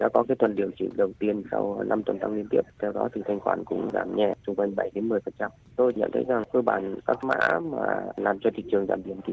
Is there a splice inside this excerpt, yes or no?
yes